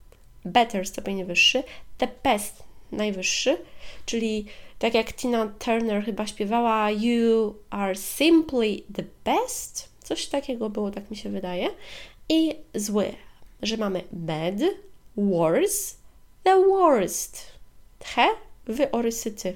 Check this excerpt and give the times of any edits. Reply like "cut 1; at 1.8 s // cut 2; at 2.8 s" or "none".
none